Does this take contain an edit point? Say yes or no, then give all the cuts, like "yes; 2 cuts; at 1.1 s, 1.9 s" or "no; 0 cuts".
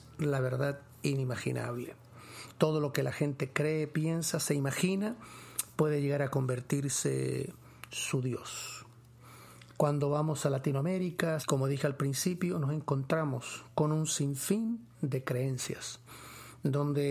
yes; 2 cuts; at 9.8 s, 11.4 s